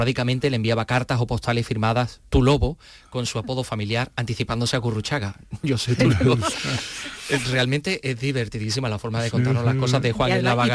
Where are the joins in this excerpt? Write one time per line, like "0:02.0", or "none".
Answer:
0:06.5